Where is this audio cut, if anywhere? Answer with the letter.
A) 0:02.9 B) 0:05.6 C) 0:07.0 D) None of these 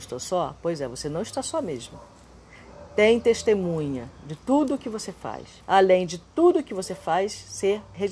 B